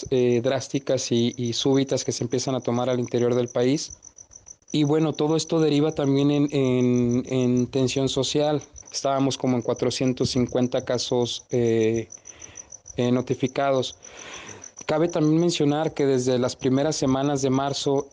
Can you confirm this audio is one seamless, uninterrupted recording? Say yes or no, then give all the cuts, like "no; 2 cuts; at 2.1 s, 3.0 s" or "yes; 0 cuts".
no; 1 cut; at 8.8 s